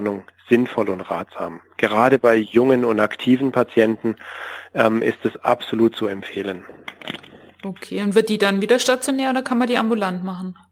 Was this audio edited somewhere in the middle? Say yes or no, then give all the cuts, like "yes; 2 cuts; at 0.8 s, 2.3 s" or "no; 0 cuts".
no; 0 cuts